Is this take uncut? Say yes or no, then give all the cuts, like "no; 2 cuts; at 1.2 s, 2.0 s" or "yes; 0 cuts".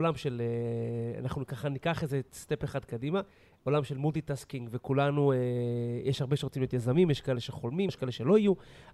no; 1 cut; at 7.9 s